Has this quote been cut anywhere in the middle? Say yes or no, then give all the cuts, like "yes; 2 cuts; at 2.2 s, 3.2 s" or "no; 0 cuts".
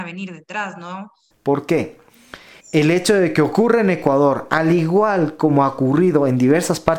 yes; 2 cuts; at 1.3 s, 2.6 s